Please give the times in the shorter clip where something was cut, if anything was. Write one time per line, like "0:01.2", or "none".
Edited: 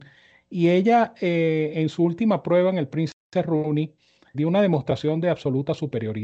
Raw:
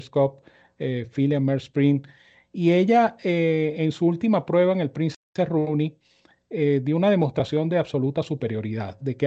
0:04.3

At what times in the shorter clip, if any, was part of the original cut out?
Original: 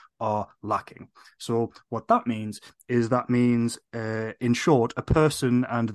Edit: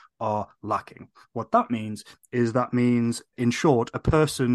0:01.2
0:03.3

